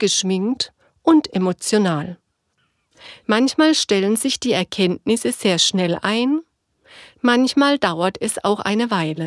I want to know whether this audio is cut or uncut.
cut